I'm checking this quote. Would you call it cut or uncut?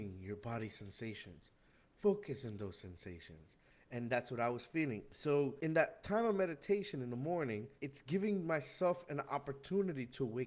uncut